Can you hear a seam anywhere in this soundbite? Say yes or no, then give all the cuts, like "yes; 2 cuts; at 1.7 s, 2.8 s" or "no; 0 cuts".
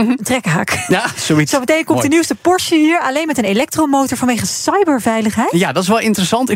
no; 0 cuts